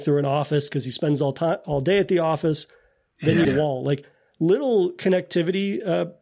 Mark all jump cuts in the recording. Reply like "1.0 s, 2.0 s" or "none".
3.4 s